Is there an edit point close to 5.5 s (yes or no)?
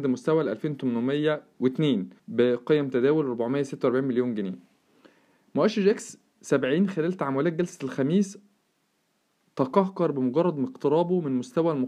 no